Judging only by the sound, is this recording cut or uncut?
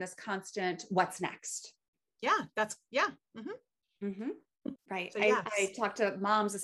cut